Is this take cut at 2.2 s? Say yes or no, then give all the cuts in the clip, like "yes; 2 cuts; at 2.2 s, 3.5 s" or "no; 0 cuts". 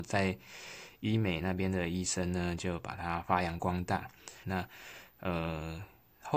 no; 1 cut; at 4.4 s